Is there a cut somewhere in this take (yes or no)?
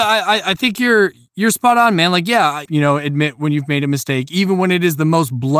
yes